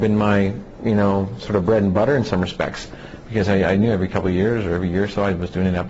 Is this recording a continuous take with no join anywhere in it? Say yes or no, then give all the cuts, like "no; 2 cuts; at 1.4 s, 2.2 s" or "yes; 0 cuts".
yes; 0 cuts